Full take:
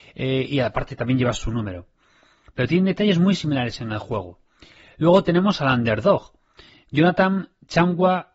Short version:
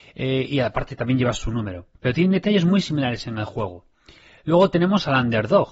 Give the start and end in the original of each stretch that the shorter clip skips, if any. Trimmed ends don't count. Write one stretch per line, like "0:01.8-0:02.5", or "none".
0:01.9-0:02.5